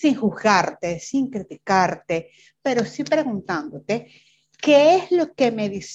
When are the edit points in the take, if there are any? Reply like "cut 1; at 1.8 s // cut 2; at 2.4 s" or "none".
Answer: none